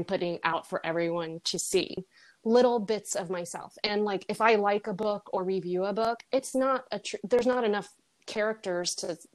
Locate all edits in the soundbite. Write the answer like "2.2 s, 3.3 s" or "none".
2.0 s